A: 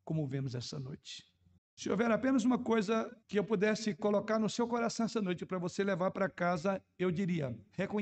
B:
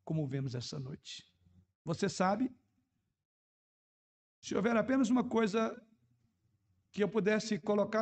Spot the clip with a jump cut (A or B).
A